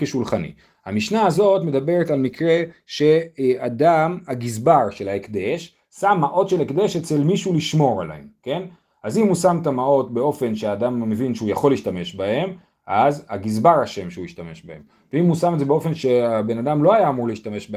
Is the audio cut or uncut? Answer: uncut